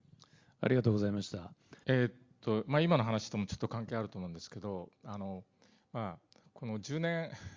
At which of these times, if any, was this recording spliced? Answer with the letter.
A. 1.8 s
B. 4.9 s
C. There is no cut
A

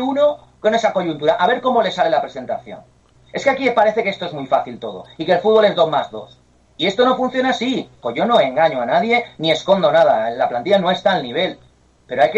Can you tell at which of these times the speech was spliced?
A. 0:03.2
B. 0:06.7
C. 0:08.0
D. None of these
C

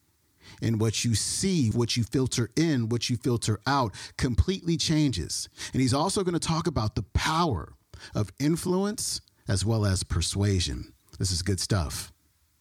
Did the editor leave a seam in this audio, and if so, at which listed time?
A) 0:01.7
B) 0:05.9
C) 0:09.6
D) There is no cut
A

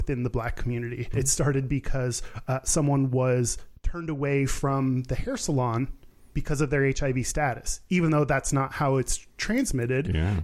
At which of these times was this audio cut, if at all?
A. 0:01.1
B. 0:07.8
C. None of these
A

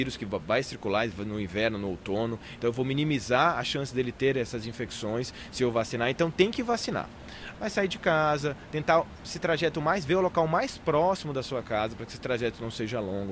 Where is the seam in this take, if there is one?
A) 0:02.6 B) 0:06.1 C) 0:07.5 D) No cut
C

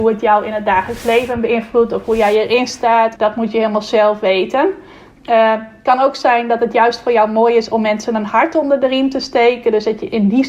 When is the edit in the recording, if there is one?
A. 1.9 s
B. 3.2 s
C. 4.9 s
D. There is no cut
B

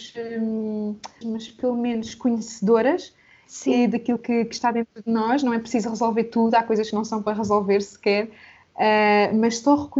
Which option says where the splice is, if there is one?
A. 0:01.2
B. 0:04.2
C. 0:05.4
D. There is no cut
A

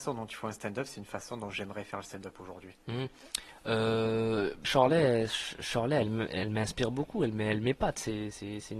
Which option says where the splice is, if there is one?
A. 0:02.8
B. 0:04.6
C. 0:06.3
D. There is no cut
B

